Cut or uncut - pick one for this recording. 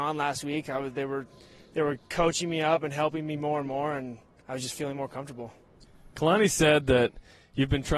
uncut